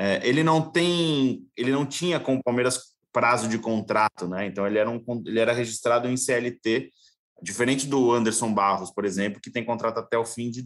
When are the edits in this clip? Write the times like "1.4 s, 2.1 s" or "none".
none